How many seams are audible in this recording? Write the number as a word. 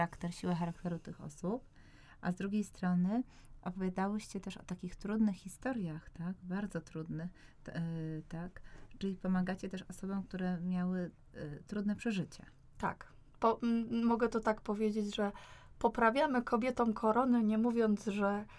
zero